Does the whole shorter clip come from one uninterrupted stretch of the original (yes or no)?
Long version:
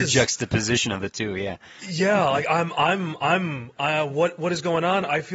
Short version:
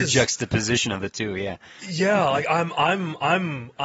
yes